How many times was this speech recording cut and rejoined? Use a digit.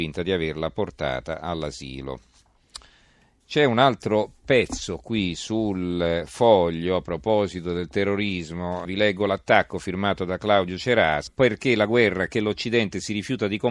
2